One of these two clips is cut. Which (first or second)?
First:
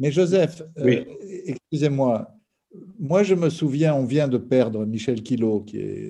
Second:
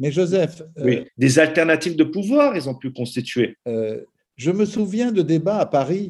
second